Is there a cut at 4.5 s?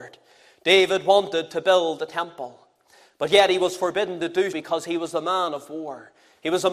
yes; 1 cut; at 4.5 s

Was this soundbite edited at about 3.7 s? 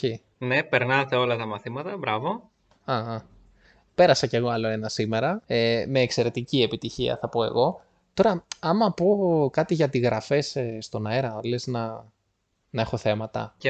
no; 0 cuts

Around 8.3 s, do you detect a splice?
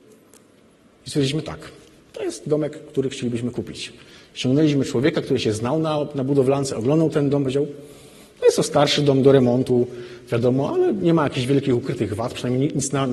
no; 1 cut; at 0.9 s

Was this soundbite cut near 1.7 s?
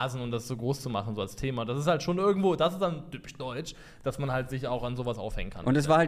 no; 0 cuts

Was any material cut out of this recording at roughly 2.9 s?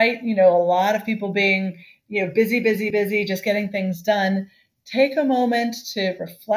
no; 0 cuts

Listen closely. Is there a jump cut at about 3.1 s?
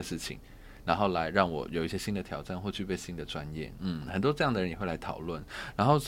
no; 0 cuts

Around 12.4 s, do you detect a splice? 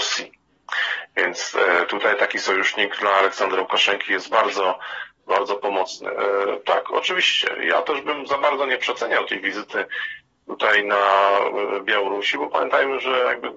no; 1 cut; at 6.6 s

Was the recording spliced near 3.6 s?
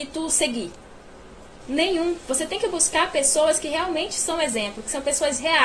no; 1 cut; at 1.6 s

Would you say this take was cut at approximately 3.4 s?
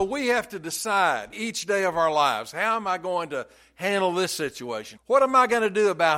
no; 2 cuts; at 1.3 s, 5.0 s

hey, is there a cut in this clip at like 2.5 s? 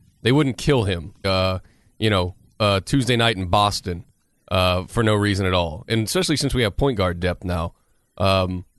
no; 1 cut; at 1.2 s

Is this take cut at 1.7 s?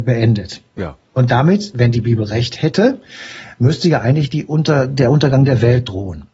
no; 0 cuts

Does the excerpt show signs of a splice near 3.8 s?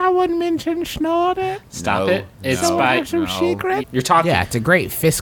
yes; 1 cut; at 3.8 s

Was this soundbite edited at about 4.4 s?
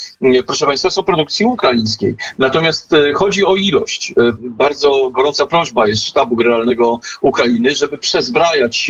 yes; 1 cut; at 4.4 s

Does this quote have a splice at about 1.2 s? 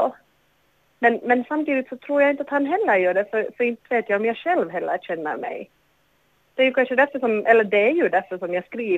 no; 0 cuts

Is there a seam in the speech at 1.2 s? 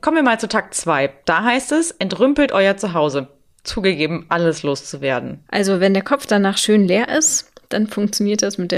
no; 2 cuts; at 4.3 s, 5.5 s

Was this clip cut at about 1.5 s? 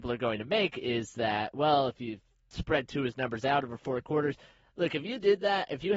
no; 0 cuts

